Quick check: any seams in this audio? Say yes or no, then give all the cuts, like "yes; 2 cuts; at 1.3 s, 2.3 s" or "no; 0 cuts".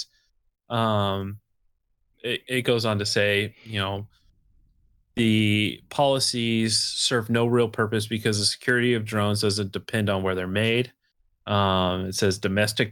yes; 1 cut; at 2.1 s